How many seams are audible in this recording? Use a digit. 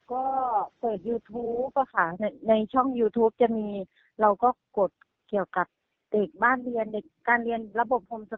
0